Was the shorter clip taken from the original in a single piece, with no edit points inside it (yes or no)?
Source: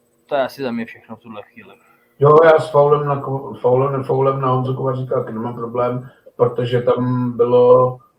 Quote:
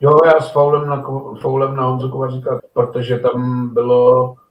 no